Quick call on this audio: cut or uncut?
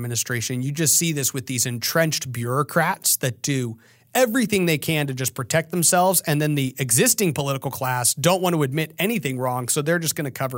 uncut